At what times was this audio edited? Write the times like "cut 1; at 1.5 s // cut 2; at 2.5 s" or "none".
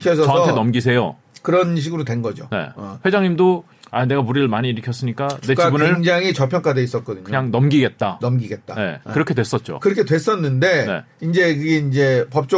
none

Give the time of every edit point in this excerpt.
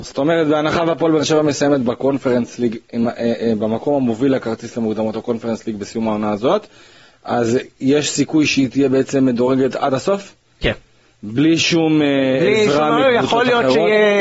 none

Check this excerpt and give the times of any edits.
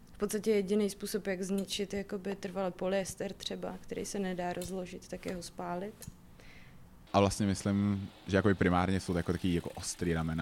cut 1; at 7.1 s

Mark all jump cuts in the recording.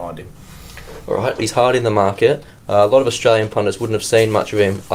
cut 1; at 1.4 s

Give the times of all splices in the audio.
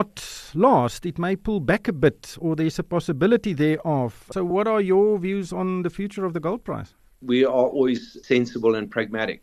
none

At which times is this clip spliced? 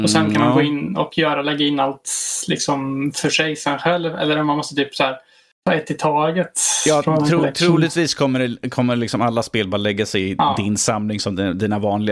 none

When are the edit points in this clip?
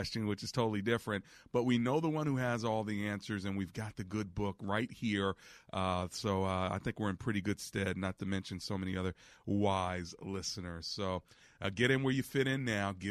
none

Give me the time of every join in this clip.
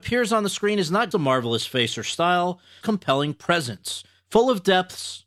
cut 1; at 1.1 s // cut 2; at 2.8 s

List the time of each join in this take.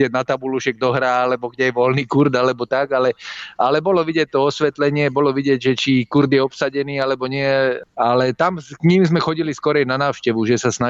none

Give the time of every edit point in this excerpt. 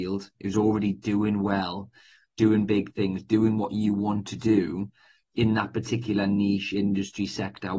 none

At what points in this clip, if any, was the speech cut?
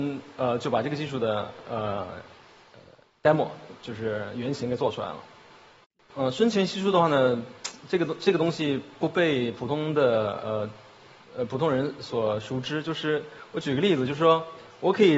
none

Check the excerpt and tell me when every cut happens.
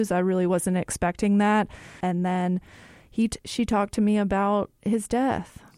cut 1; at 2.0 s

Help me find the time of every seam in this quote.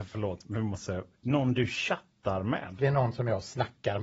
cut 1; at 2.8 s

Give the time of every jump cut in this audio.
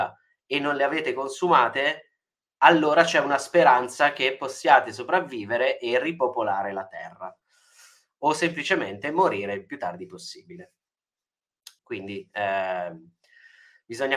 cut 1; at 11.8 s

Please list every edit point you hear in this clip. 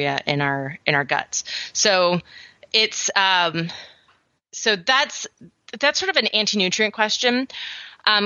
none

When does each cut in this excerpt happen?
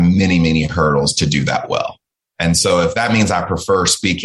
none

